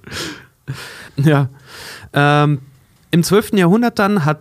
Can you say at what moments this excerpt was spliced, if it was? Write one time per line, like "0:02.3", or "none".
0:01.1